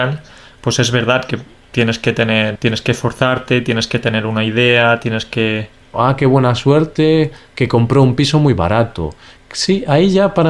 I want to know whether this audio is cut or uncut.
cut